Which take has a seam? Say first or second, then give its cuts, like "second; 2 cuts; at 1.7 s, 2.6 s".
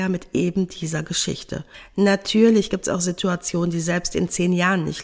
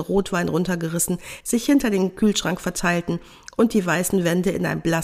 second; 1 cut; at 1.4 s